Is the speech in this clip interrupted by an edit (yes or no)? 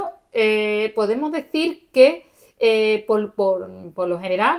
no